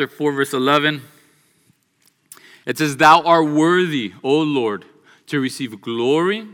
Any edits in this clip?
no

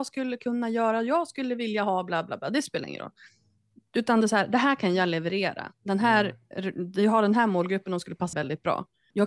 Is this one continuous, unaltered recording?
no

